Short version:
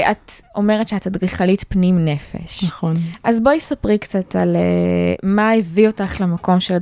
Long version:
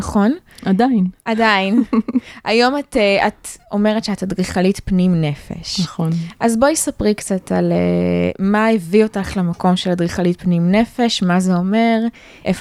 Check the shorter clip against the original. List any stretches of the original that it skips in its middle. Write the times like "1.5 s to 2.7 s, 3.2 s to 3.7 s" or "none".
none